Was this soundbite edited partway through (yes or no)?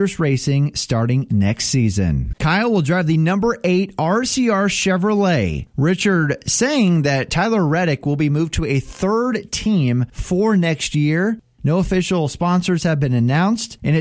yes